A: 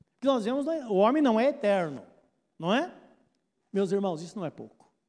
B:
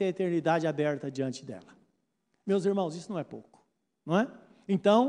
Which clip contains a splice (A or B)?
A